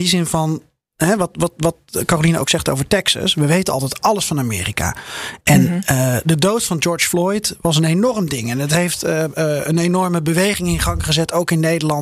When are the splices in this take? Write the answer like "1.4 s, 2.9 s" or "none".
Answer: none